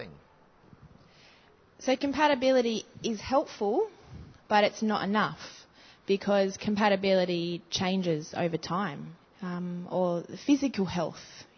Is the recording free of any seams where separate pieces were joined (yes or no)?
no